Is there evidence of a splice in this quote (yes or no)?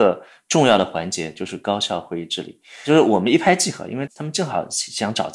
yes